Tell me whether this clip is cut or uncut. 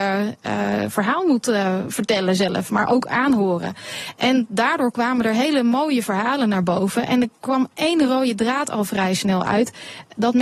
uncut